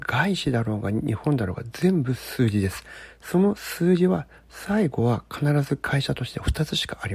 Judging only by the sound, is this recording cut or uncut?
uncut